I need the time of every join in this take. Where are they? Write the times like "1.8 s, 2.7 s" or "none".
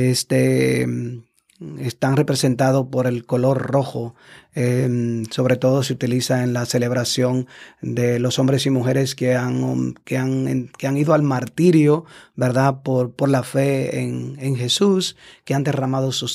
none